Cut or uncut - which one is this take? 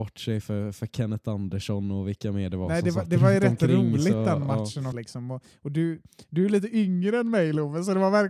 cut